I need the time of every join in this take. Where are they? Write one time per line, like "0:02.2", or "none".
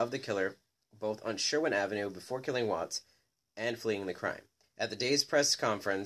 0:04.6